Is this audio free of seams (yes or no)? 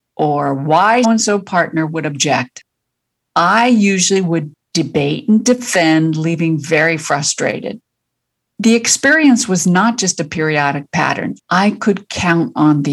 no